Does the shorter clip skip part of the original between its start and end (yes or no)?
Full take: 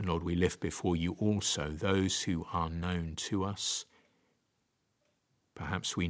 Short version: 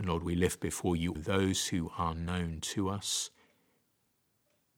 yes